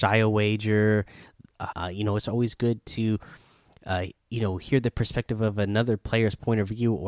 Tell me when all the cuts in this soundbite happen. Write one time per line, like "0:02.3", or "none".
0:01.7
0:04.2